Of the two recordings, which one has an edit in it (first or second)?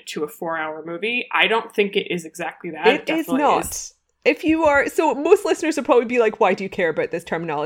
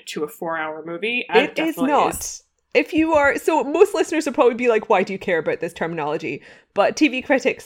second